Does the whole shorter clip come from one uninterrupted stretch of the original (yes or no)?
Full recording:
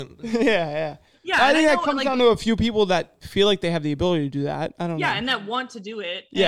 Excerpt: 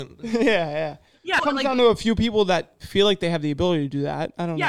no